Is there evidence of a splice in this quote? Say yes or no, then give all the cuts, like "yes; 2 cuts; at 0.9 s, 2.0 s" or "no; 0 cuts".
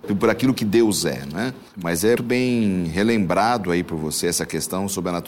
yes; 1 cut; at 2.2 s